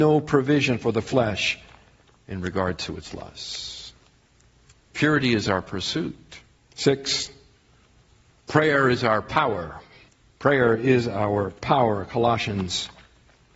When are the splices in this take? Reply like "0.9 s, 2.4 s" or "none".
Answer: none